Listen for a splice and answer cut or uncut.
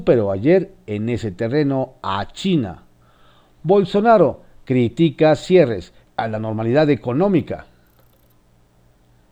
cut